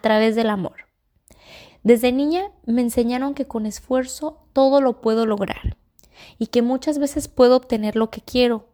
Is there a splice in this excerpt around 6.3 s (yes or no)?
no